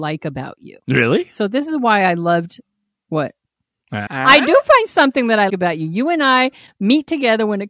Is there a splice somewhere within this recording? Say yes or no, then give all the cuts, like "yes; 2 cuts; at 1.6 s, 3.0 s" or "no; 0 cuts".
yes; 2 cuts; at 4.1 s, 5.5 s